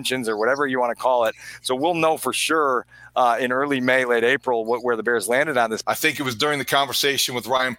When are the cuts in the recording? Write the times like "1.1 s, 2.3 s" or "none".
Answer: 5.8 s